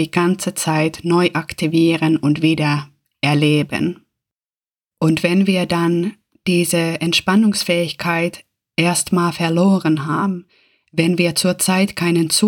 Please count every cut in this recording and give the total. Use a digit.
0